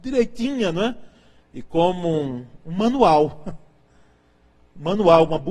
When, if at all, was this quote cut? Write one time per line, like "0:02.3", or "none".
0:01.4